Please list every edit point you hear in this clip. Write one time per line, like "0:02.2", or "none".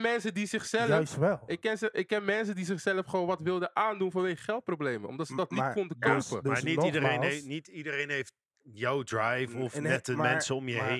none